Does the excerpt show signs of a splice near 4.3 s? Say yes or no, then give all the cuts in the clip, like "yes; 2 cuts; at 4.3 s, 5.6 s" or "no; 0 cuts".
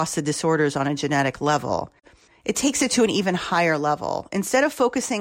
no; 1 cut; at 2.3 s